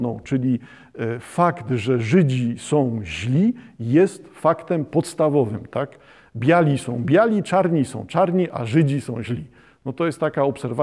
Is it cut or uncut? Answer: uncut